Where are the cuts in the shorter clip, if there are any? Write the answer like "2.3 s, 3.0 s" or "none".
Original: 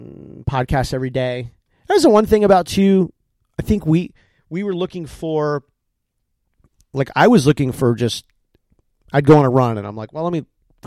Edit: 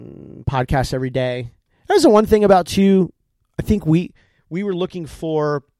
none